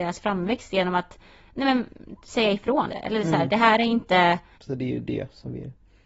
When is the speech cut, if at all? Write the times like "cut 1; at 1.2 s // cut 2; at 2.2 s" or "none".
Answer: cut 1; at 2.9 s // cut 2; at 4.5 s